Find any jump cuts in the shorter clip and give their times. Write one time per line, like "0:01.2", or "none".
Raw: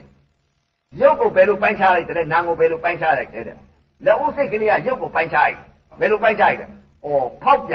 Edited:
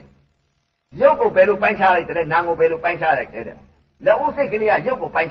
none

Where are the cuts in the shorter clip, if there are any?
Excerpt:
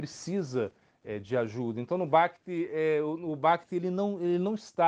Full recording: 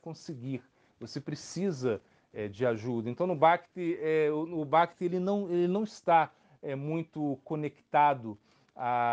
none

